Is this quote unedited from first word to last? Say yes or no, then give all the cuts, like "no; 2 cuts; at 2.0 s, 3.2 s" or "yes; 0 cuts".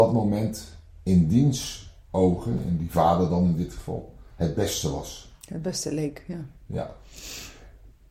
yes; 0 cuts